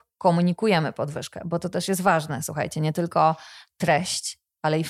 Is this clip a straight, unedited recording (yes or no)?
yes